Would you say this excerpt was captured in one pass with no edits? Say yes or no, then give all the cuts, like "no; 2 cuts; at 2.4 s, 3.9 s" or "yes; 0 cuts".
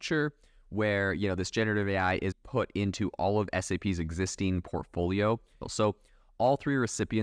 no; 2 cuts; at 2.3 s, 5.6 s